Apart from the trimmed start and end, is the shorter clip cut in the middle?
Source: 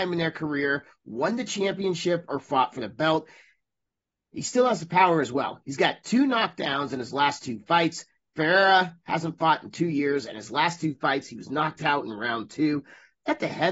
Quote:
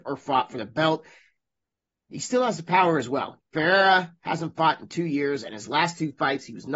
yes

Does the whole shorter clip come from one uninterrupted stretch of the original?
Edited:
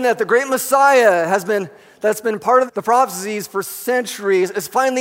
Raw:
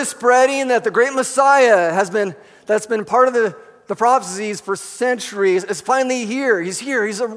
no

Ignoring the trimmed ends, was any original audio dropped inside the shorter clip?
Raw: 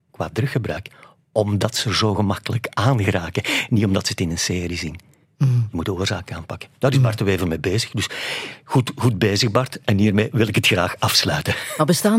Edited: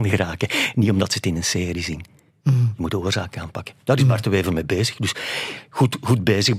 no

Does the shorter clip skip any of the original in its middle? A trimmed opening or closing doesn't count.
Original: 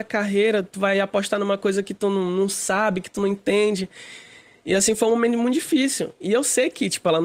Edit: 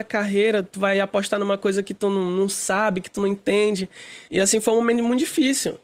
yes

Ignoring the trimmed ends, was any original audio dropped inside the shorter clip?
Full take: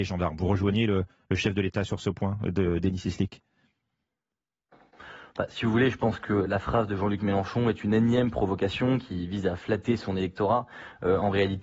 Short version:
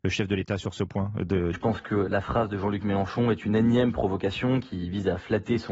yes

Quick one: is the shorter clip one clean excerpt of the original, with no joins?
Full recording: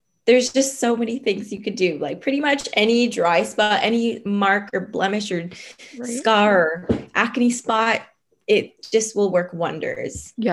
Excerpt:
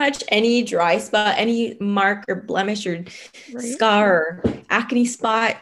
yes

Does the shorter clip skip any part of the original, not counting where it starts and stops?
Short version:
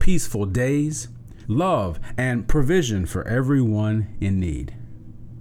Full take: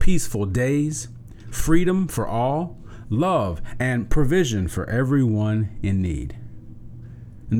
yes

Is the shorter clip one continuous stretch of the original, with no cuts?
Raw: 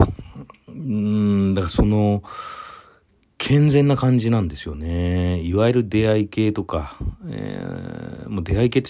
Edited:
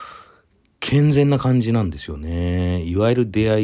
yes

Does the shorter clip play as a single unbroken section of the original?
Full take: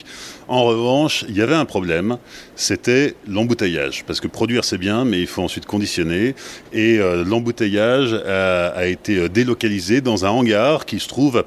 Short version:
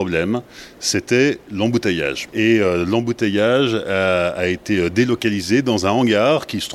no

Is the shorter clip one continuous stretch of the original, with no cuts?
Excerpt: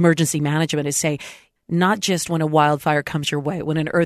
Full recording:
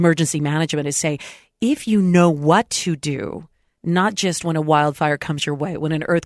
no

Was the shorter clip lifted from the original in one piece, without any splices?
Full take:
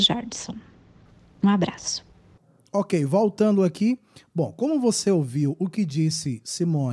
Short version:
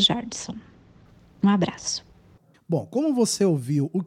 no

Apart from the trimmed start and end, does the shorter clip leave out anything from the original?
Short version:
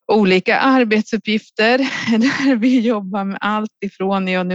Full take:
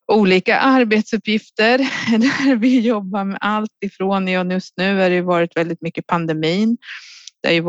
no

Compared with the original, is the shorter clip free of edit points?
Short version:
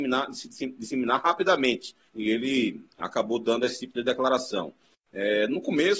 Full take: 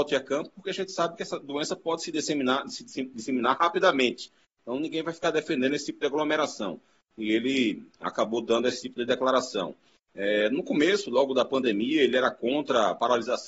no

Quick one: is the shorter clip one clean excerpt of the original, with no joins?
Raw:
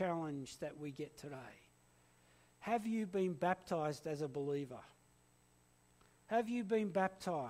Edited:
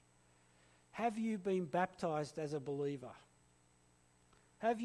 yes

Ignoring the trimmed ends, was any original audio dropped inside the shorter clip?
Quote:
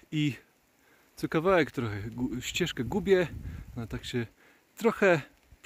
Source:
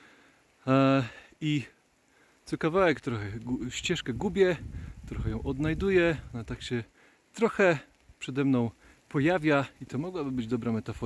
yes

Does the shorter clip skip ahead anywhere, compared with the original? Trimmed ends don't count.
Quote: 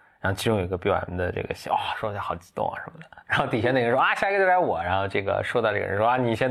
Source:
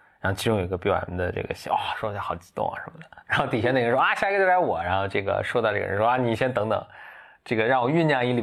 no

